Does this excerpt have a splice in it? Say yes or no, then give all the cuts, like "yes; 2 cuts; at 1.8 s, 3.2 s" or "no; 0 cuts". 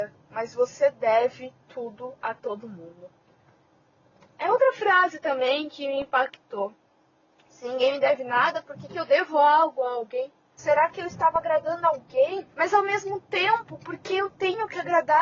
yes; 2 cuts; at 10.6 s, 12.5 s